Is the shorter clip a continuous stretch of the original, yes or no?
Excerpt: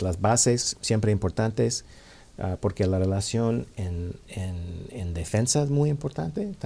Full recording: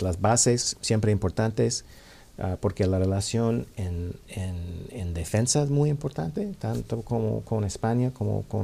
yes